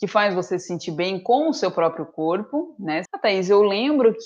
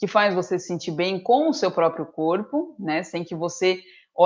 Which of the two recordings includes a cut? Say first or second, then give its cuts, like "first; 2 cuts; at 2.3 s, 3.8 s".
first; 1 cut; at 3.1 s